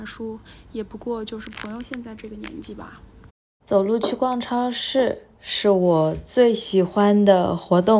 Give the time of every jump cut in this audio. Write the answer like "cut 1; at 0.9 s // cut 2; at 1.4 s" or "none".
cut 1; at 3.6 s